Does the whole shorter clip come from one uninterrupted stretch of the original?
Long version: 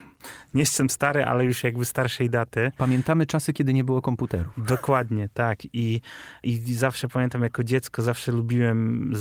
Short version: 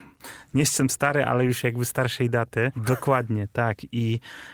no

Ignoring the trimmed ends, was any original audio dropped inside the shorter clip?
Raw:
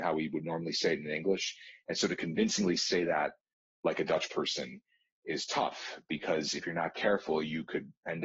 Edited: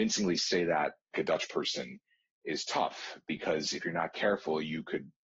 yes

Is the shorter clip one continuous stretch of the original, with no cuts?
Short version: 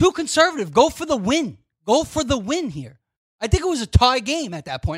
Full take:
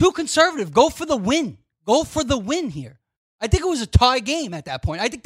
yes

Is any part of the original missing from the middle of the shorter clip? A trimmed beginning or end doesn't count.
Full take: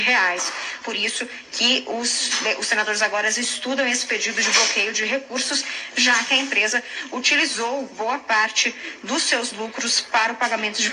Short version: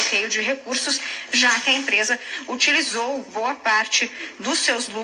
no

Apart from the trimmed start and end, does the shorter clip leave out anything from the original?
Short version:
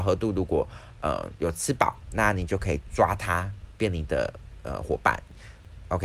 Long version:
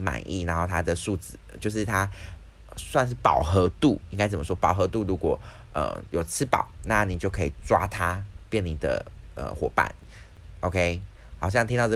no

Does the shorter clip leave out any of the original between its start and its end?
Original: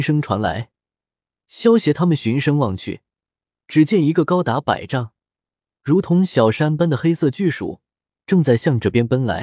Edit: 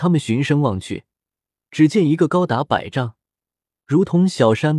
no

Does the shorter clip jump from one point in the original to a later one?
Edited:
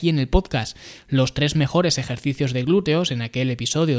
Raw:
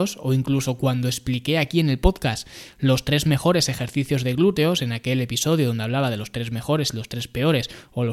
no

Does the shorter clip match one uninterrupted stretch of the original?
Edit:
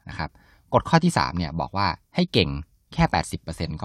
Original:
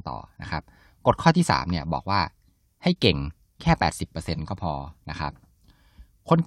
no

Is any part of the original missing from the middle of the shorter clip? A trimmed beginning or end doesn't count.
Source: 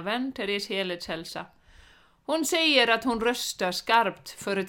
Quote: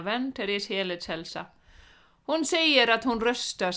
no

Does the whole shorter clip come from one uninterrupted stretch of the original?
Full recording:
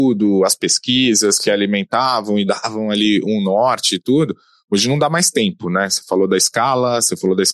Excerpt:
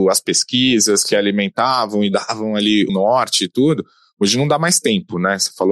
no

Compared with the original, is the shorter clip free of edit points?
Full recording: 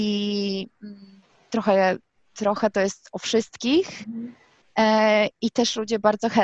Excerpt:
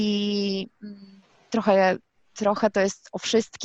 yes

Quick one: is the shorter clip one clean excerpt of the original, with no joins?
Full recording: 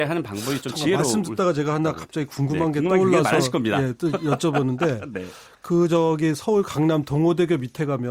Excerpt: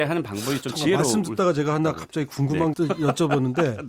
no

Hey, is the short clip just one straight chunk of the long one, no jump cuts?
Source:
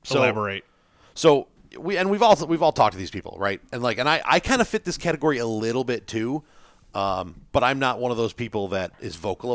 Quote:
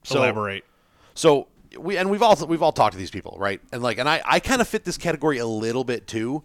yes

